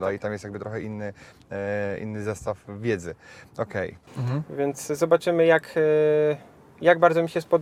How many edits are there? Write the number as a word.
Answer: one